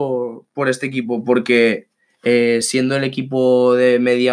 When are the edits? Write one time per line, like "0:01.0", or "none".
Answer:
none